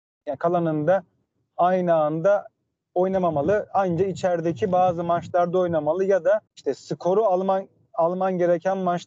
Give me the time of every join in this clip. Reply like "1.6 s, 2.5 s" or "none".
6.5 s